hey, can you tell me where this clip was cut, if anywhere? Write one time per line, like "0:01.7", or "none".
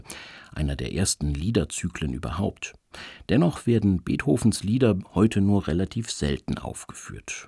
none